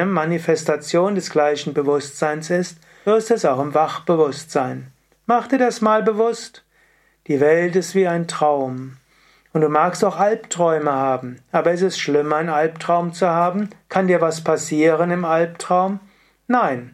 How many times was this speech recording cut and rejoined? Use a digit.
1